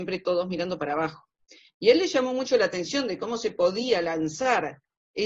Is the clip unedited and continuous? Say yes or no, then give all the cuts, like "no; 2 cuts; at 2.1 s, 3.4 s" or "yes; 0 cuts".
yes; 0 cuts